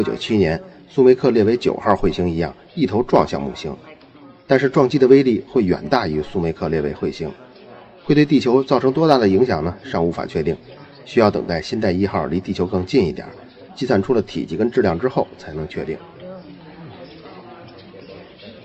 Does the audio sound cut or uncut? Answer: cut